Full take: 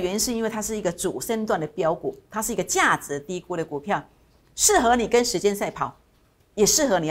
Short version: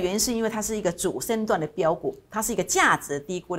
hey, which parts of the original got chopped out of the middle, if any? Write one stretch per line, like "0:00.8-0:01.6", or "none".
none